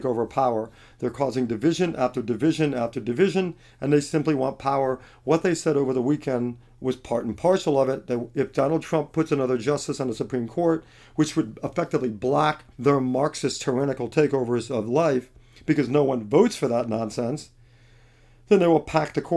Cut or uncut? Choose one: cut